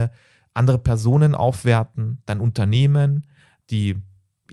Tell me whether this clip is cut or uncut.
uncut